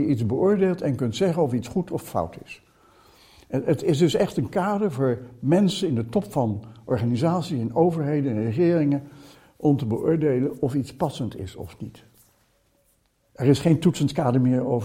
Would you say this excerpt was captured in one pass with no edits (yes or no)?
no